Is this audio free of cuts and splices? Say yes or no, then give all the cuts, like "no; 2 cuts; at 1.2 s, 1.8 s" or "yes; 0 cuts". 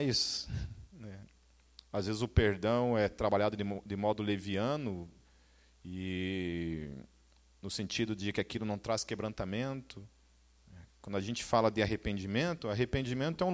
yes; 0 cuts